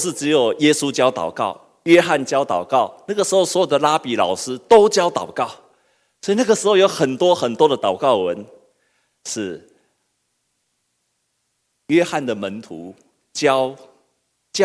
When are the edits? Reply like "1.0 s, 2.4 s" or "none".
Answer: 9.1 s